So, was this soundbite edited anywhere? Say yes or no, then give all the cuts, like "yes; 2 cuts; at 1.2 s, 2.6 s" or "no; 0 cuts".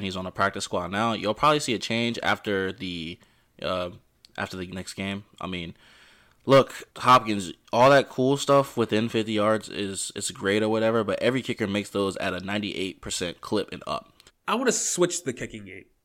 yes; 2 cuts; at 6.9 s, 14.3 s